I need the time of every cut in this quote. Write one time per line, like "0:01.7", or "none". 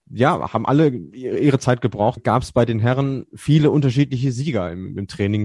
0:02.2